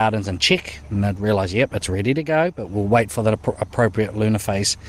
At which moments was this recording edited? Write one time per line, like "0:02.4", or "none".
none